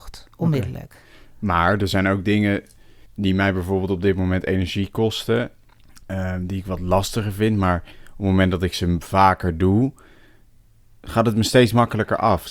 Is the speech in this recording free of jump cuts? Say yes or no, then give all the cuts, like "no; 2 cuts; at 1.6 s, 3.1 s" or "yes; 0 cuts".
yes; 0 cuts